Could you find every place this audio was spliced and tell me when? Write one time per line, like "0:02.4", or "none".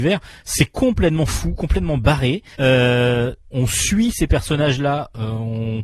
0:02.5